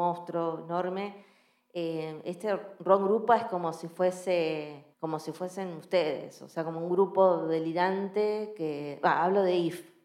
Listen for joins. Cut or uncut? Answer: cut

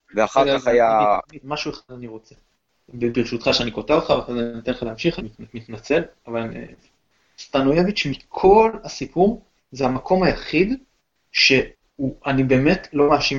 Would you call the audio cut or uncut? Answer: cut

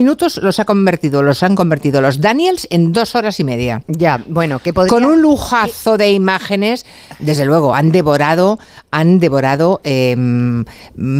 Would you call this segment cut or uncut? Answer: uncut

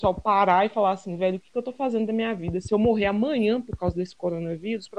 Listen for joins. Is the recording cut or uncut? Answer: uncut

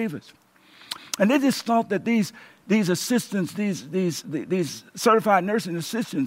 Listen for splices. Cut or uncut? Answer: cut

